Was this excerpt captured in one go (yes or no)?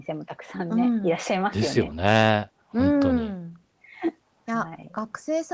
yes